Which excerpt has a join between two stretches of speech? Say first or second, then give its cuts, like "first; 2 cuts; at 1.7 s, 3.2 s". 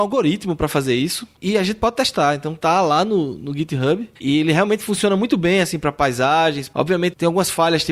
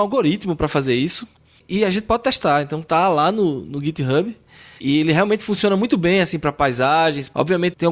first; 2 cuts; at 1.4 s, 4.1 s